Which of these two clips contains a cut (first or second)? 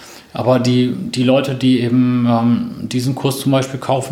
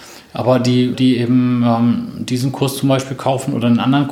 second